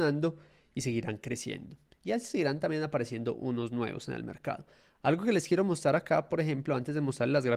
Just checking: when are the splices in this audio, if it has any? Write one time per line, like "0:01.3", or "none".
none